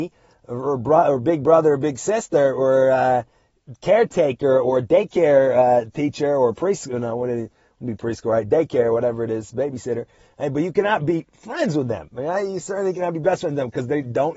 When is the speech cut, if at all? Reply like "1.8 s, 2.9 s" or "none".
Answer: none